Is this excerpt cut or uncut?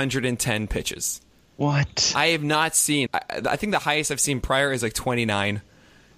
cut